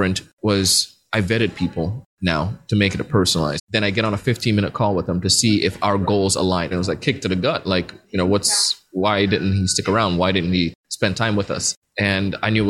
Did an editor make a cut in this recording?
yes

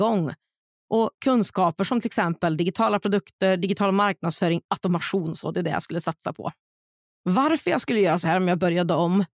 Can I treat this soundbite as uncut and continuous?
no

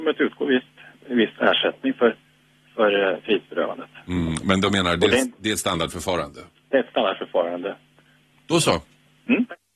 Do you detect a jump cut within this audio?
yes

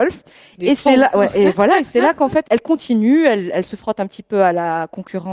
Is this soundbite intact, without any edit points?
yes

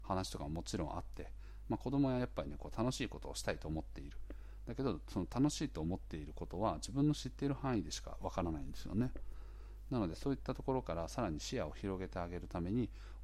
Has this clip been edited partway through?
no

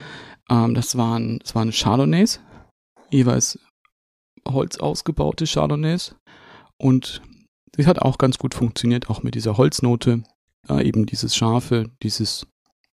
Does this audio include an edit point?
no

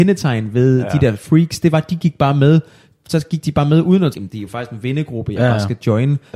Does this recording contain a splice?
yes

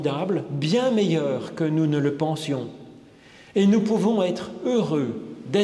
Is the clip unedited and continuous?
yes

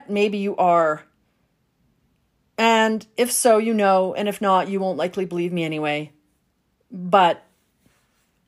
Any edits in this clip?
no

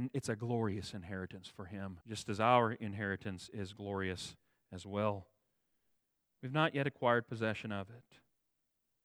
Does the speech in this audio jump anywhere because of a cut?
yes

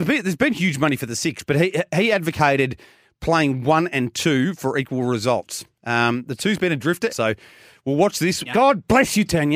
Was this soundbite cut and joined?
yes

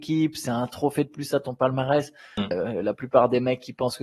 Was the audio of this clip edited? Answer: yes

